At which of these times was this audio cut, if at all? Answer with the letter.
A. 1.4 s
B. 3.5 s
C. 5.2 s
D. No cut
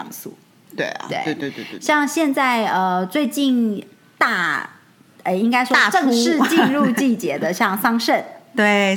D